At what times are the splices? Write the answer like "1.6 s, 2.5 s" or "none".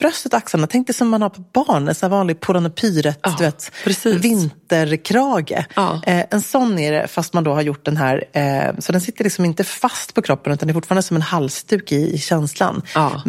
none